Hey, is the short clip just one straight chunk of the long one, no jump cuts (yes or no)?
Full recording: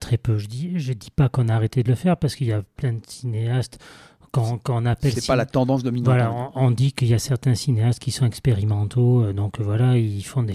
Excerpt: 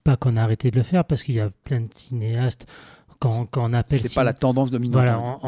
yes